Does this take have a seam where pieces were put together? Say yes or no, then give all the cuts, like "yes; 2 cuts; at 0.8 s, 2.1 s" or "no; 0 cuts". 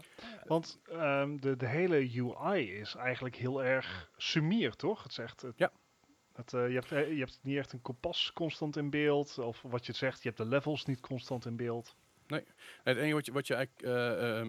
no; 0 cuts